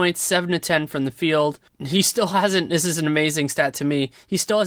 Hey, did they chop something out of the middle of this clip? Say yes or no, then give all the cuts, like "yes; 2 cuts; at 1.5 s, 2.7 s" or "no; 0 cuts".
no; 0 cuts